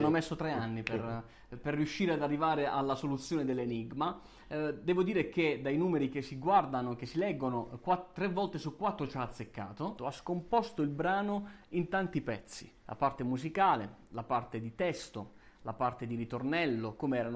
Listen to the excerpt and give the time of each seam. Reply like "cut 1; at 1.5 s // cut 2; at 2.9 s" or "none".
cut 1; at 10.0 s // cut 2; at 12.8 s